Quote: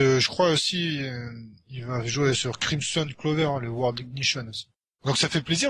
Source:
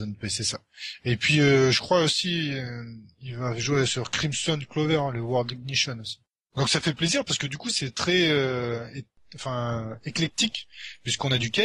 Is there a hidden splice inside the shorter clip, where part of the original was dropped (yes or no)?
no